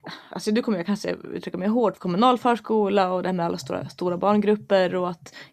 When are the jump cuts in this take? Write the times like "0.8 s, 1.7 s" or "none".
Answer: 2.0 s

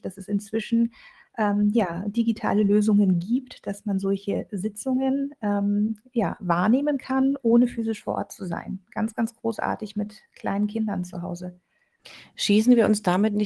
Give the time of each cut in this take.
none

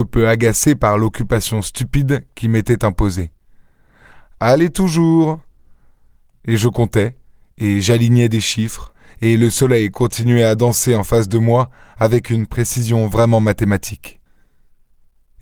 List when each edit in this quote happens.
none

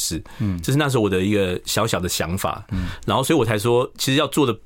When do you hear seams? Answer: none

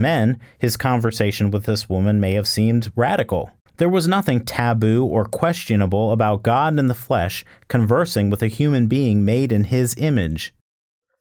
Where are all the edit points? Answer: 3.7 s

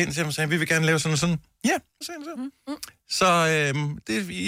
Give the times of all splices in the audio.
2.0 s

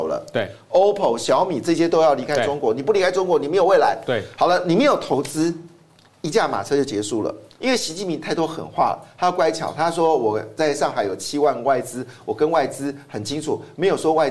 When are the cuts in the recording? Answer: 7.6 s

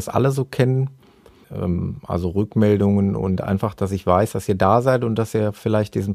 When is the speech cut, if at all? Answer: 1.4 s

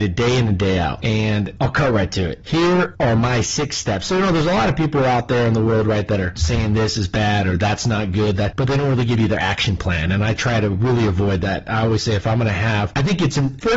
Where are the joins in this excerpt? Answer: none

